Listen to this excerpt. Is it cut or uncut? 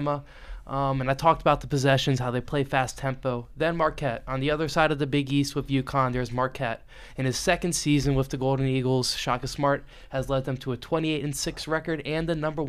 uncut